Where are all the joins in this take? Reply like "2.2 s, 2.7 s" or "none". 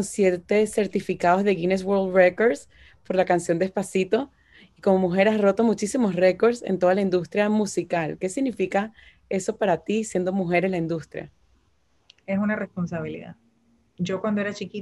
none